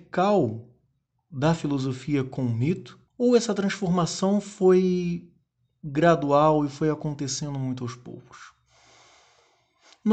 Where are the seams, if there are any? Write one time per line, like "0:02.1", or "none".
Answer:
0:03.1